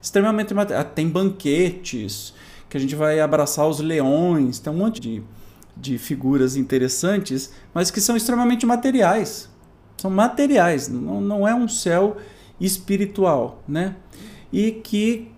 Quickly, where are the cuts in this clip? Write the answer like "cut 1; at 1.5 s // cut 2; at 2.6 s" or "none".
cut 1; at 5.0 s